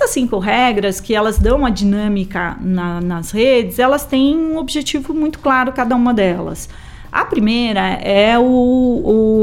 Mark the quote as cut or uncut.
uncut